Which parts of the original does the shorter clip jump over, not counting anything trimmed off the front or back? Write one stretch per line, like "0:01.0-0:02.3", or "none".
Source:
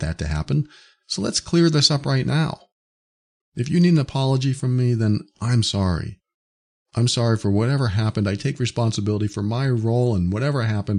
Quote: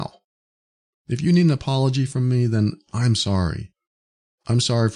none